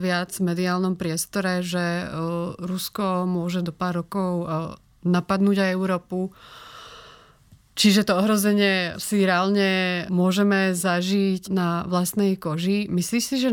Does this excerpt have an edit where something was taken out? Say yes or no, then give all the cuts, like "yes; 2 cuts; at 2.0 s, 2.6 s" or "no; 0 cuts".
yes; 3 cuts; at 8.9 s, 10.1 s, 11.4 s